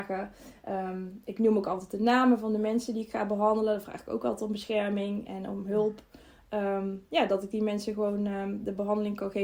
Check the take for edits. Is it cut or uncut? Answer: uncut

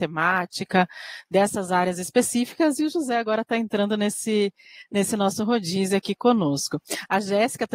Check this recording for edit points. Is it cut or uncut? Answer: uncut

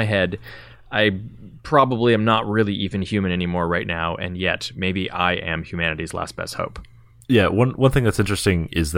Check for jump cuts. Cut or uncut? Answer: uncut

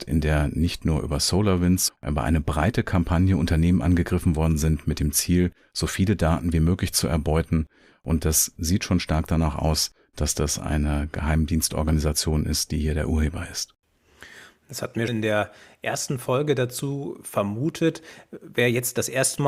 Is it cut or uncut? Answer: cut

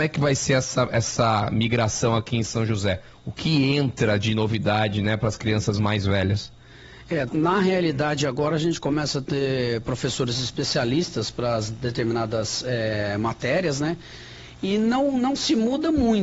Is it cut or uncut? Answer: cut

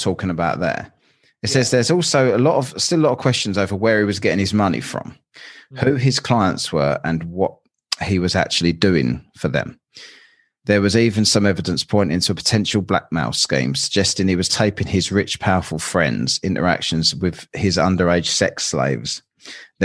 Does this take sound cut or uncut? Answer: uncut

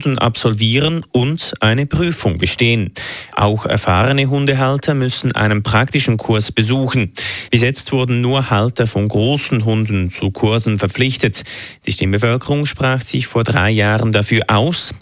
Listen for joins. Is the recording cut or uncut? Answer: cut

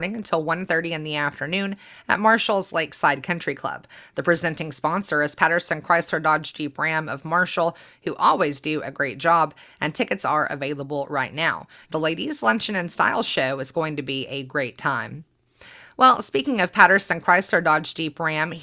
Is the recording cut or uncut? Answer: cut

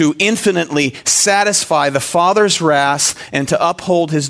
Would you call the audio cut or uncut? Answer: uncut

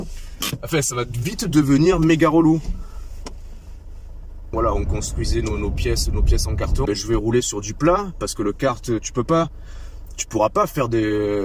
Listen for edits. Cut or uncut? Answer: cut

